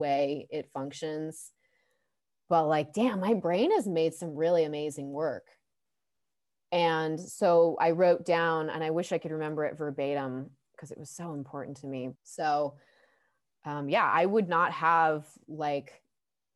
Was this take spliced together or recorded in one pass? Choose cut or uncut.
cut